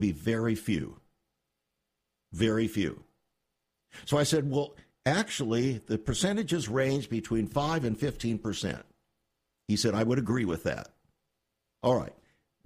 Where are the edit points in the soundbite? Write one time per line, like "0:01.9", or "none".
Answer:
none